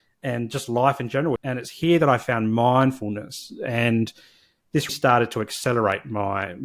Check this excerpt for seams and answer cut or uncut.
cut